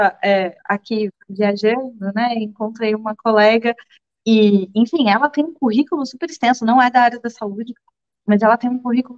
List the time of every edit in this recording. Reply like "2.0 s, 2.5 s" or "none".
none